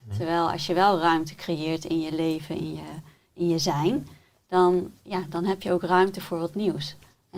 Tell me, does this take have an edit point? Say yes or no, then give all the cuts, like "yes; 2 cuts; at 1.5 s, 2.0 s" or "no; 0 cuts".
no; 0 cuts